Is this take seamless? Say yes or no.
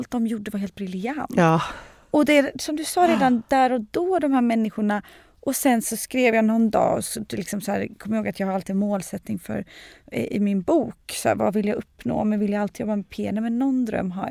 yes